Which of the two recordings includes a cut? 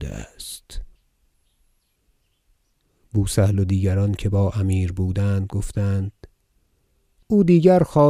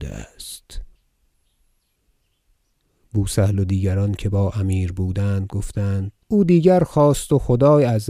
second; 1 cut; at 6.2 s

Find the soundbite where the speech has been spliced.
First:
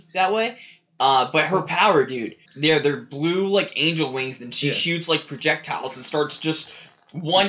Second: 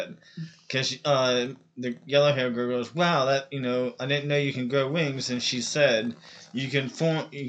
first; 1 cut; at 2.5 s

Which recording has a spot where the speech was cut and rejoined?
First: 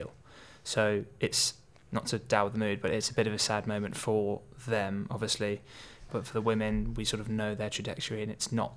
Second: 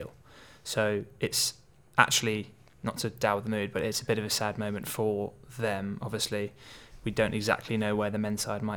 first; 2 cuts; at 1.7 s, 6.1 s

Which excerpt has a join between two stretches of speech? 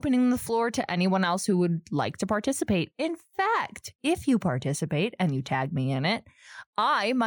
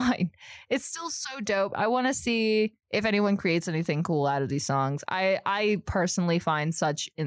second; 1 cut; at 2.8 s

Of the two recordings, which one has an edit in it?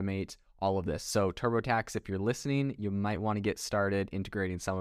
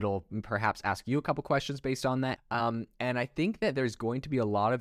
second; 1 cut; at 2.4 s

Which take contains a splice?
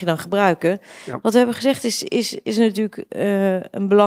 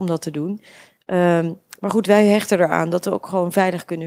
first; 1 cut; at 1.2 s

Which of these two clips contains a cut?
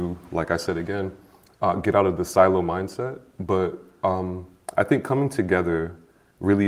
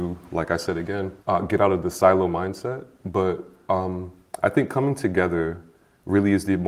second; 1 cut; at 1.2 s

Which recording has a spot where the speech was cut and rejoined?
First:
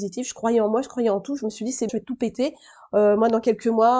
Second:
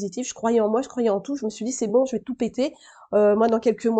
first; 1 cut; at 1.9 s

